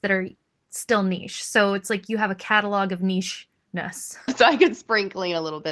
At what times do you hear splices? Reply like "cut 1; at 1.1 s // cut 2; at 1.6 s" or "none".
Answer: cut 1; at 4.3 s